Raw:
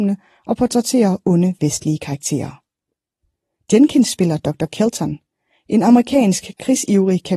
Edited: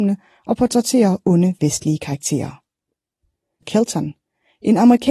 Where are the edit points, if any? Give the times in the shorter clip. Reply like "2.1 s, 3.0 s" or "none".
3.6 s